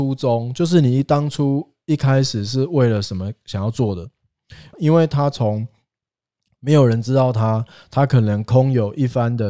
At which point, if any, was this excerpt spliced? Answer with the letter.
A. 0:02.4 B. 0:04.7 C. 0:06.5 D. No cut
B